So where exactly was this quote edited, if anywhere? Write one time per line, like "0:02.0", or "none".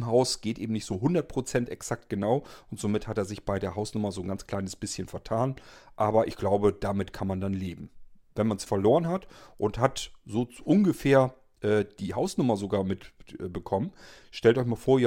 0:08.7